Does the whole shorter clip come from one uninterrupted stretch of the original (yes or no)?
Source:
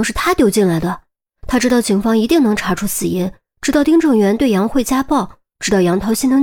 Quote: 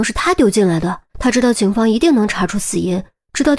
no